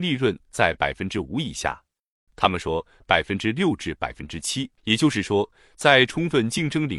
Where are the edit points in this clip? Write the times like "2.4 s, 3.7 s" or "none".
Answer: 2.3 s, 4.8 s